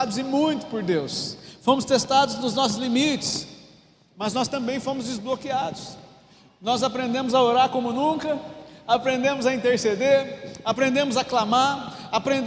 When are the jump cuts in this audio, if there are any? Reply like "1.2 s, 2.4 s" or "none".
none